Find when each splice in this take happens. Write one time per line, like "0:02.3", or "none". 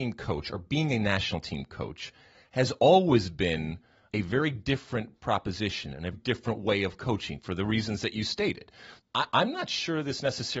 0:06.1
0:09.0